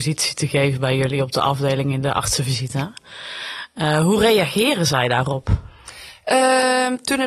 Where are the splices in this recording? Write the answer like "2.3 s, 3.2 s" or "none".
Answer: none